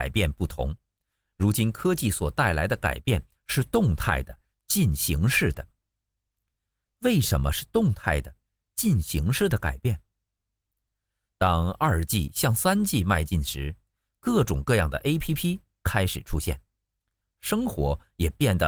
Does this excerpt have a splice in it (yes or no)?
no